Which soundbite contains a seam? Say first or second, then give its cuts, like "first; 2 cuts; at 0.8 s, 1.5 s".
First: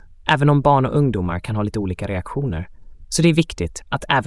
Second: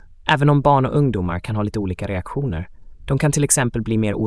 first; 1 cut; at 3.0 s